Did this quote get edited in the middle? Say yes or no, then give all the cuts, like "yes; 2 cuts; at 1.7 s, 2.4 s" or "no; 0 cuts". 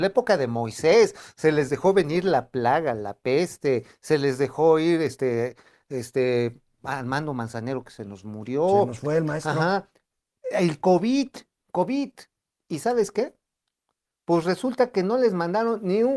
no; 0 cuts